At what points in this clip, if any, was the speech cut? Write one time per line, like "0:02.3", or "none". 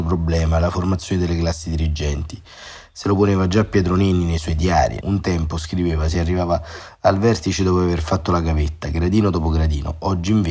0:05.0